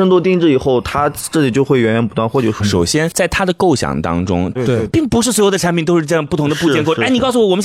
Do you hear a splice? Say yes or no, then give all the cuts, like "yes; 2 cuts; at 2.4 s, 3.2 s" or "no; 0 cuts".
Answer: yes; 2 cuts; at 2.6 s, 4.6 s